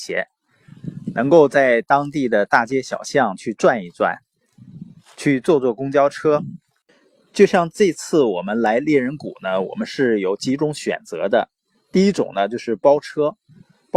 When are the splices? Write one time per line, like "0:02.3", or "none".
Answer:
none